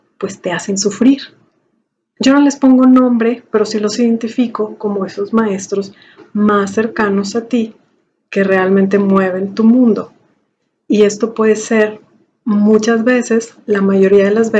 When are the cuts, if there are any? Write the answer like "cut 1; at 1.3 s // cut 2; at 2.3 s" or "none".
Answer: none